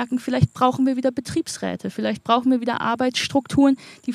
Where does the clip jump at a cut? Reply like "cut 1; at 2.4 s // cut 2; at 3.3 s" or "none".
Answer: none